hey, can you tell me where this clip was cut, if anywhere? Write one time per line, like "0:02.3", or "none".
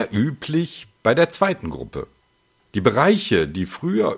0:02.6